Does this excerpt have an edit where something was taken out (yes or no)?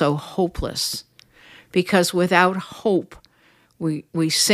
no